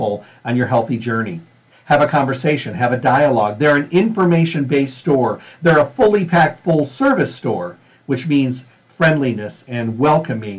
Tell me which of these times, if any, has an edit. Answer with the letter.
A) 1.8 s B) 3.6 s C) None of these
C